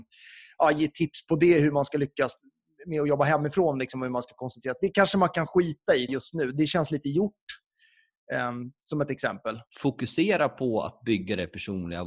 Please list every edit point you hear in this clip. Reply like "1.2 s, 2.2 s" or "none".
6.1 s, 9.7 s